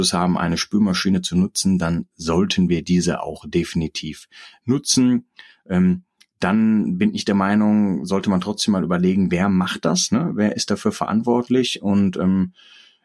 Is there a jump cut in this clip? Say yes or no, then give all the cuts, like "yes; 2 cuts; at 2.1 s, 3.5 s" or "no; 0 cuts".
no; 0 cuts